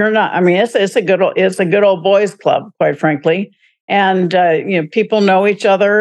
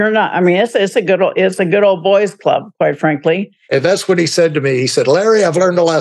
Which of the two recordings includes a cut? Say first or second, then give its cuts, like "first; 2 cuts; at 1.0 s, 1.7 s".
second; 1 cut; at 3.7 s